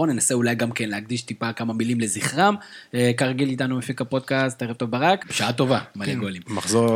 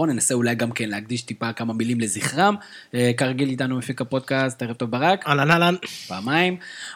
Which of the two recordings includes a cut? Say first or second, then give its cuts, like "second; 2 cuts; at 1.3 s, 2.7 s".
first; 1 cut; at 5.2 s